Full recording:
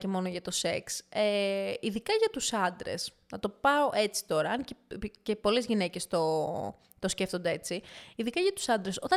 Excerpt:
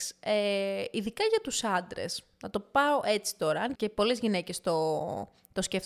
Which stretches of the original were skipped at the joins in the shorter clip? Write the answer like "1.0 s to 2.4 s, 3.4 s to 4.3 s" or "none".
4.6 s to 5.2 s